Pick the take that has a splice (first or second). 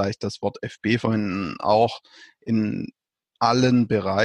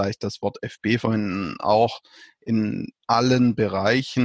second